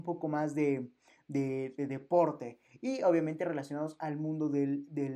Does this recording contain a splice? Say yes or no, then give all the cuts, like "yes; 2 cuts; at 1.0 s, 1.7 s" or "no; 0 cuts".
no; 0 cuts